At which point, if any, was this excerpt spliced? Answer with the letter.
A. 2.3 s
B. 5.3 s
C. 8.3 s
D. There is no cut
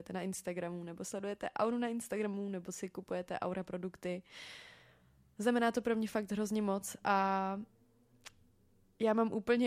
D